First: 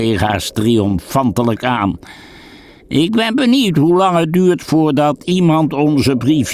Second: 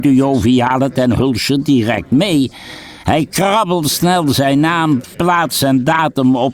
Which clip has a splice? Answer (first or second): second